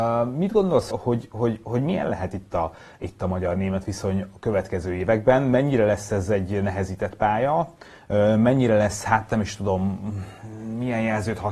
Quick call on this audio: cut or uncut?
cut